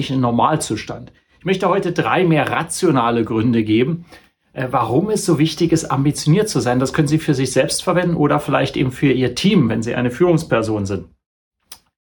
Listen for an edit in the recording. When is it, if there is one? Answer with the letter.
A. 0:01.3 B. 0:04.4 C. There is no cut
C